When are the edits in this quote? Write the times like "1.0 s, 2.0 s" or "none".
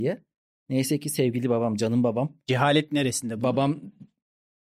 none